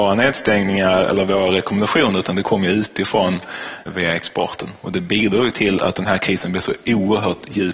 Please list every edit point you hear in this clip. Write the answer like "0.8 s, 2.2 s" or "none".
3.9 s, 5.8 s

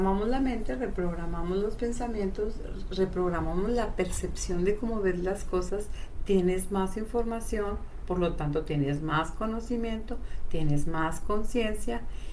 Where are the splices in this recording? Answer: none

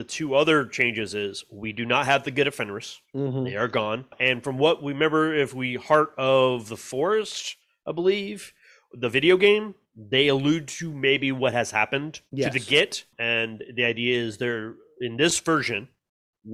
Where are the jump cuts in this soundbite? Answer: 12.3 s

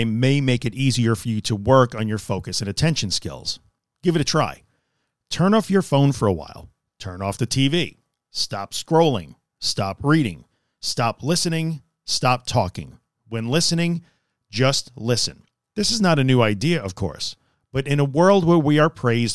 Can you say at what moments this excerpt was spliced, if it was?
13.1 s, 15.7 s

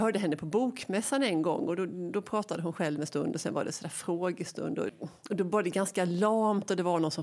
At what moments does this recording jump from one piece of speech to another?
4.9 s

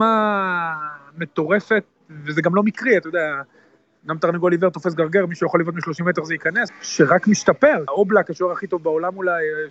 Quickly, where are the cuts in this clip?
6.7 s, 7.9 s

